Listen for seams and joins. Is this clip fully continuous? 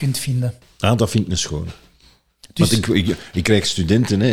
yes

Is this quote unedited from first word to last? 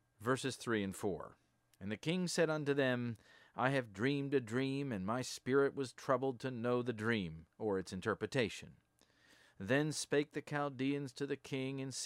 yes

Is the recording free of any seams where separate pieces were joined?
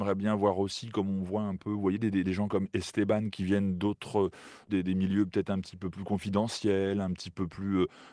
no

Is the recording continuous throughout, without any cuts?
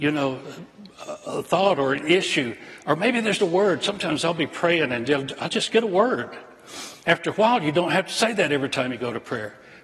no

